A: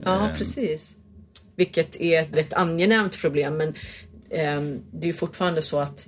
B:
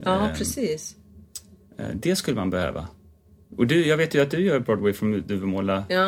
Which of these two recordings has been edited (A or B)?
A